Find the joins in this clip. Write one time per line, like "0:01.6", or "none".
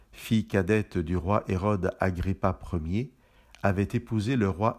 none